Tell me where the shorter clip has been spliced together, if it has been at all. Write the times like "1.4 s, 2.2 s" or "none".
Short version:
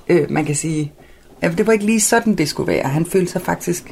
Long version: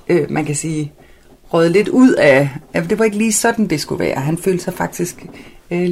1.3 s